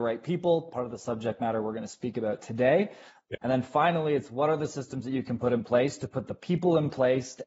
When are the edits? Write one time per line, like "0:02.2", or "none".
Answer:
0:03.3